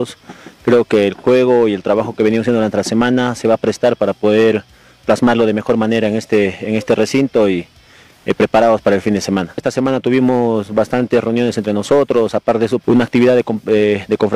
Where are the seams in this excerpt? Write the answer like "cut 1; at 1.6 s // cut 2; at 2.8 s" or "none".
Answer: cut 1; at 9.6 s // cut 2; at 12.8 s

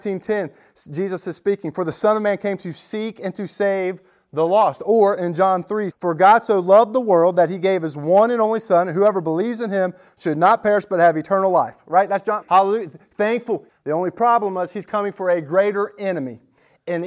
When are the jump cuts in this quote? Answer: cut 1; at 5.9 s // cut 2; at 12.4 s // cut 3; at 13.7 s

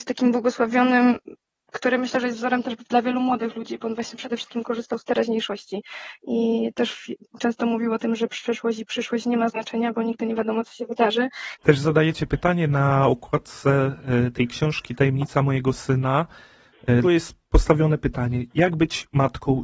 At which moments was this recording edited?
cut 1; at 11.6 s // cut 2; at 17.0 s

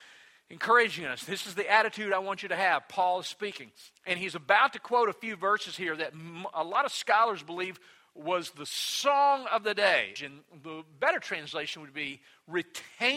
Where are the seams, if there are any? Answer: cut 1; at 10.2 s

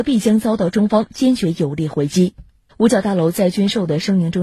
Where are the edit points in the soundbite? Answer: cut 1; at 2.7 s

